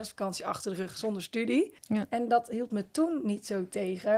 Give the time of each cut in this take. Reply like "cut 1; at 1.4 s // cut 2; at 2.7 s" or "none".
cut 1; at 1.8 s